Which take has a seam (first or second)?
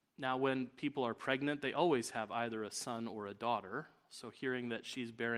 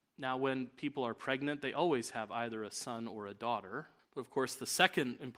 second